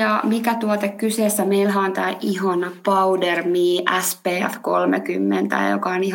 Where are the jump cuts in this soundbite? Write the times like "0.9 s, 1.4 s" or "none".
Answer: none